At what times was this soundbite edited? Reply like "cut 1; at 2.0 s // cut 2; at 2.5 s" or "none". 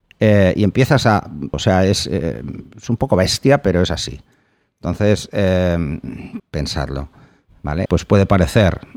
cut 1; at 1.5 s // cut 2; at 6.4 s // cut 3; at 7.9 s